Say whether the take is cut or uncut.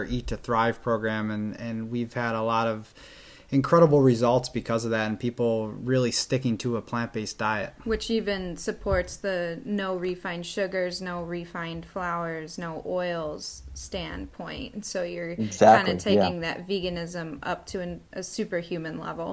uncut